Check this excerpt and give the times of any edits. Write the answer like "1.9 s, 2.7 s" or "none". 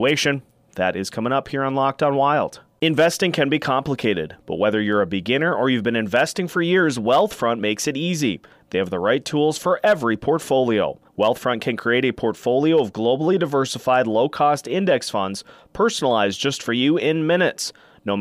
11.1 s